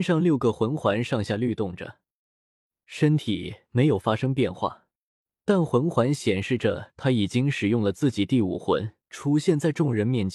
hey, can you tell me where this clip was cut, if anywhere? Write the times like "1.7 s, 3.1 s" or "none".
9.1 s